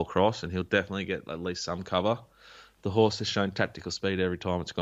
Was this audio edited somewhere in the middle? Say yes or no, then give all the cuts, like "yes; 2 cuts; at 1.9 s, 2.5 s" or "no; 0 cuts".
no; 0 cuts